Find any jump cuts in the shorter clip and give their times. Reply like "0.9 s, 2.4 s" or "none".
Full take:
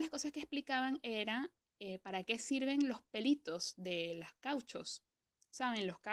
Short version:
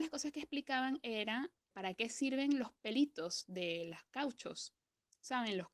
1.7 s

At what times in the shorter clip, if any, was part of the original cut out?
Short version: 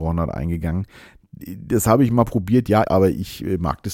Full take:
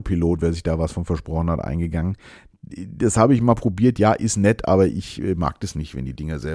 2.8 s

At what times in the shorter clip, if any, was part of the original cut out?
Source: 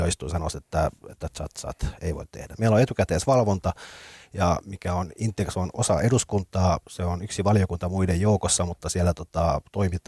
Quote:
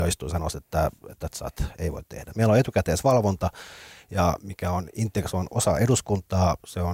1.3 s

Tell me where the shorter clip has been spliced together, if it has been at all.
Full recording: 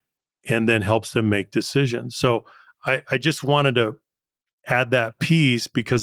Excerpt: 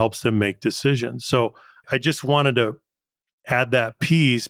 1.8 s

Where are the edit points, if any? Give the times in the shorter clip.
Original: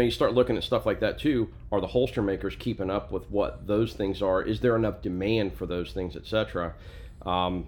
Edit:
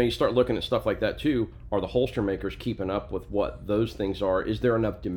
none

